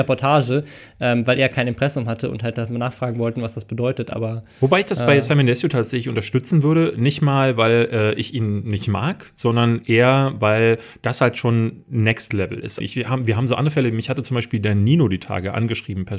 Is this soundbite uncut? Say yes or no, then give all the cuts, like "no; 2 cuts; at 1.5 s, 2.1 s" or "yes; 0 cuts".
no; 1 cut; at 12.8 s